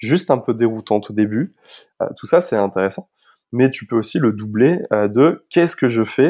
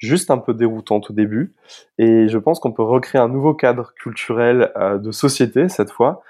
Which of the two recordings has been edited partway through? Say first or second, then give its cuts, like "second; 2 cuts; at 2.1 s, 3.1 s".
first; 1 cut; at 1.9 s